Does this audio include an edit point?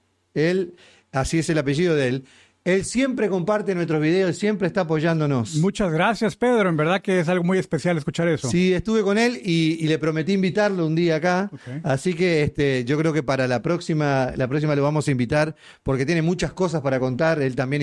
no; 0 cuts

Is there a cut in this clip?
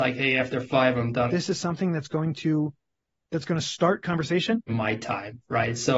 yes; 2 cuts; at 1.3 s, 4.7 s

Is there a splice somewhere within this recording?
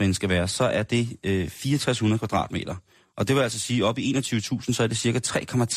no; 0 cuts

